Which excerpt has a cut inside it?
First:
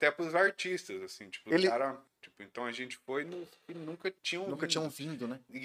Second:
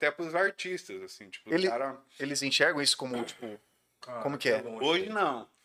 first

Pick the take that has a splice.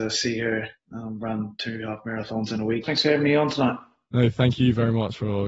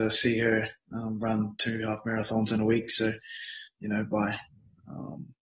first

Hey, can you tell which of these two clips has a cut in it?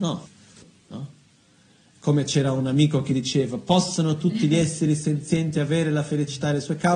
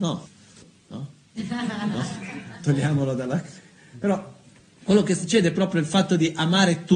second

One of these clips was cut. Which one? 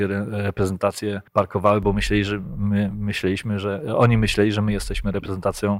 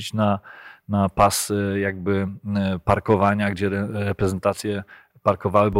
first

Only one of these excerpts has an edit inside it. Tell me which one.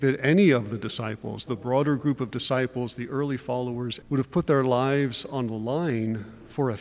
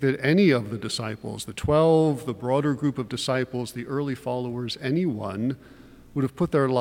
first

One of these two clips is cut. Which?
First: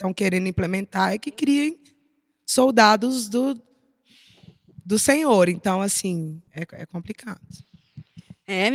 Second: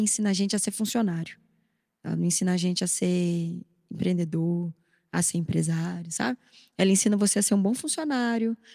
first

